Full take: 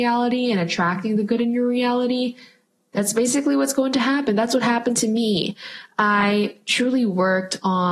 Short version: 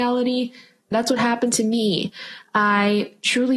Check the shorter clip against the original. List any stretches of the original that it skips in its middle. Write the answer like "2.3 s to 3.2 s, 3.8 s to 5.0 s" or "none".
2.8 s to 4.4 s